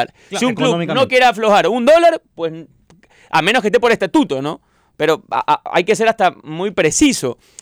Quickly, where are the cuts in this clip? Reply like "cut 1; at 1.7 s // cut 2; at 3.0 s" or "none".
none